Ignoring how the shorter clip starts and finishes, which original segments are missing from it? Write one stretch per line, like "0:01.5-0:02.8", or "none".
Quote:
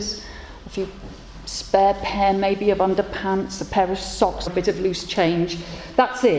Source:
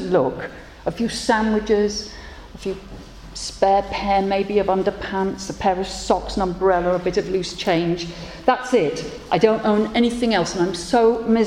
0:06.3-0:07.0